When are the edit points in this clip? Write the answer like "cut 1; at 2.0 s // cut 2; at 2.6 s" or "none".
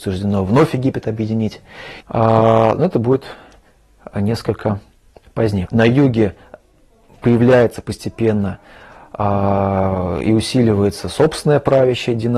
cut 1; at 2.0 s // cut 2; at 5.7 s